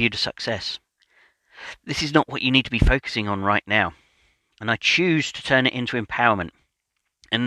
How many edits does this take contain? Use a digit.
0